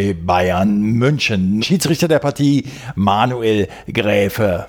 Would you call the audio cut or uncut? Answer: cut